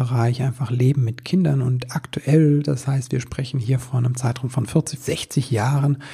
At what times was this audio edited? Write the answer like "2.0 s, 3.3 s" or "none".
5.0 s